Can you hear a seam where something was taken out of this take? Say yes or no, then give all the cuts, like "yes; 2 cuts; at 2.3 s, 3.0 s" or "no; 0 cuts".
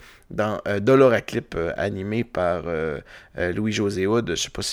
no; 0 cuts